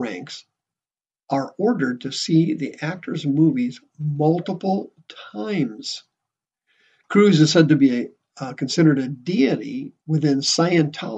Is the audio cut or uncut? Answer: uncut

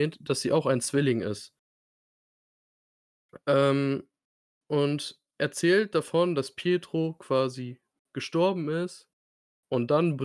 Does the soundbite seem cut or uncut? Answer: uncut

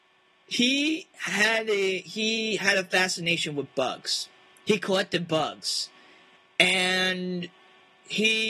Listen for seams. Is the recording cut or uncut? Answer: uncut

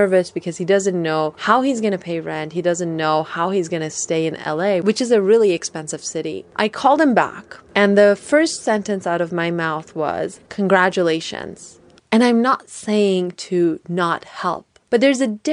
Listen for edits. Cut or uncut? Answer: cut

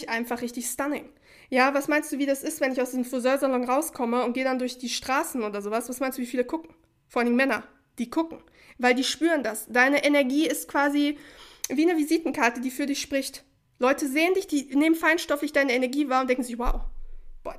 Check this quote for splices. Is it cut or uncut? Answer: uncut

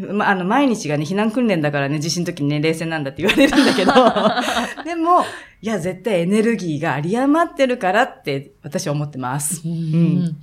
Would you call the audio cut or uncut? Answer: uncut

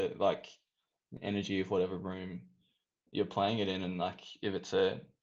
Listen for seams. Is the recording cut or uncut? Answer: uncut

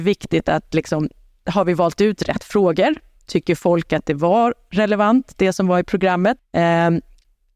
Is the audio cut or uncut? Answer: cut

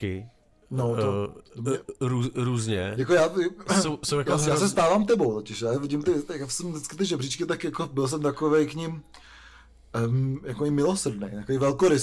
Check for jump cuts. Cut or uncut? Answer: uncut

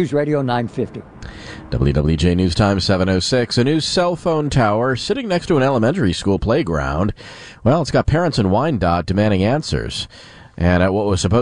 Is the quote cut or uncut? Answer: uncut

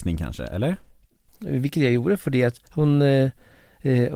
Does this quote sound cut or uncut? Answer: cut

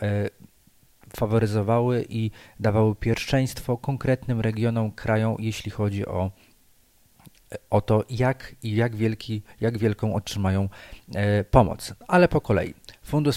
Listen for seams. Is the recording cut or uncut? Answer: uncut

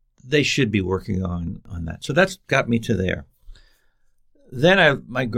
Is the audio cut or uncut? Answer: uncut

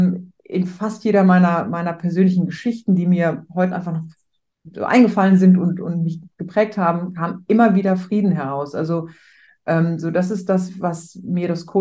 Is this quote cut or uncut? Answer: uncut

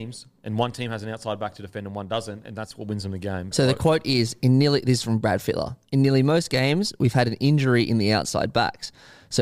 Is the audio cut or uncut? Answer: cut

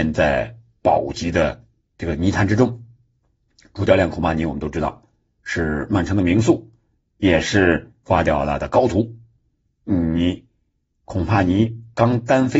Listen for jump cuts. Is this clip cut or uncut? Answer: cut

